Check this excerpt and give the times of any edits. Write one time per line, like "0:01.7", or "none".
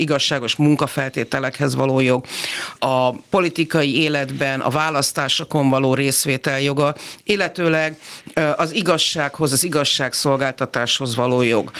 0:02.8